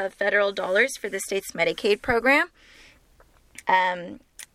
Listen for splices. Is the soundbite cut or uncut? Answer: cut